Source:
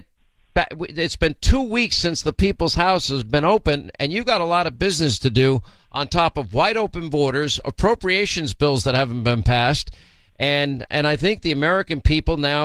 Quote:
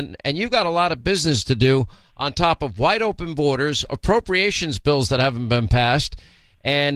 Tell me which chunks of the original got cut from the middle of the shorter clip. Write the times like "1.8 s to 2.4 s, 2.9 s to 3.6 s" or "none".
none